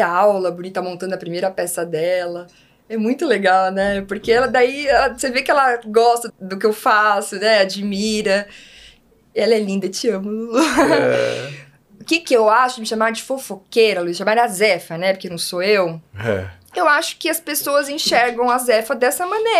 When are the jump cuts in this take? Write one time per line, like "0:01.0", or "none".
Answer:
0:06.3